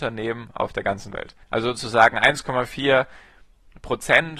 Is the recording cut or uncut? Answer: cut